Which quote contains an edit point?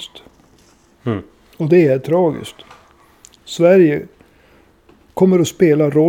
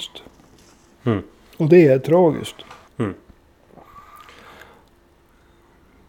second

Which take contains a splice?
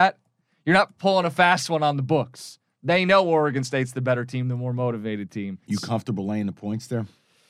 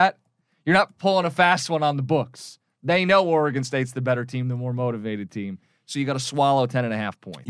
first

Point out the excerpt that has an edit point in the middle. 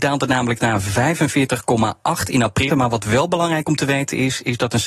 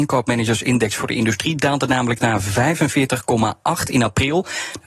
first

